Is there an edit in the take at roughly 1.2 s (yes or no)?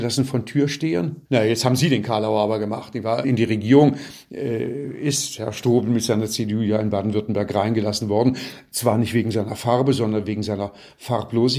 yes